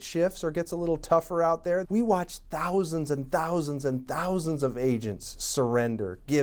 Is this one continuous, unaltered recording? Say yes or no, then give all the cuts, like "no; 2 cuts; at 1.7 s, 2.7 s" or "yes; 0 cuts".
no; 1 cut; at 1.8 s